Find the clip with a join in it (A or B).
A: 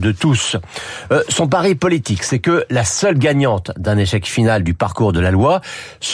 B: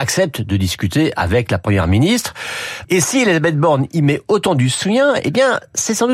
B